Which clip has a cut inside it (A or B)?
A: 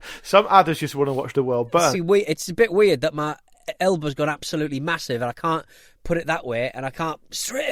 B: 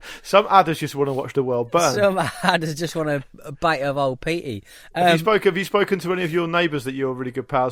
A